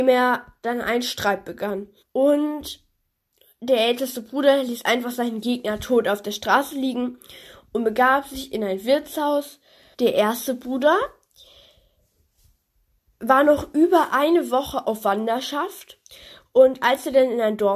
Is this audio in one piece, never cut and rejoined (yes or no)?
no